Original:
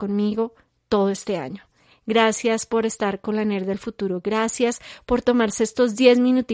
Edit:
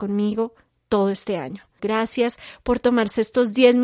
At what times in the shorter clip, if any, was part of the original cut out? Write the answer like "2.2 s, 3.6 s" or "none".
1.8 s